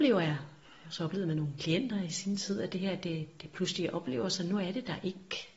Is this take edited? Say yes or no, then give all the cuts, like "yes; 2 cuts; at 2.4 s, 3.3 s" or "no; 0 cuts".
no; 0 cuts